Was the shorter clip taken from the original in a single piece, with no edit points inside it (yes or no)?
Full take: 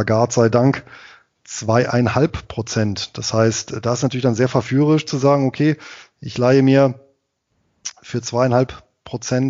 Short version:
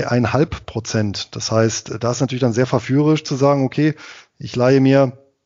yes